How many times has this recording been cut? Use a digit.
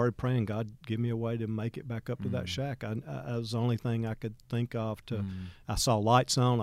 0